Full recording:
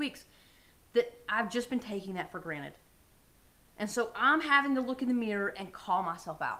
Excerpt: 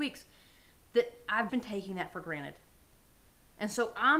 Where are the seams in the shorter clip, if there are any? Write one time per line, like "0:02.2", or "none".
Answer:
0:01.5